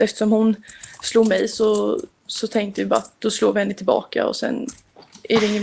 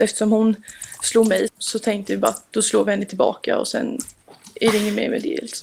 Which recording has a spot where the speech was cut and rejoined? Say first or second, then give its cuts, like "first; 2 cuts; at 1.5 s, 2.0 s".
second; 1 cut; at 1.5 s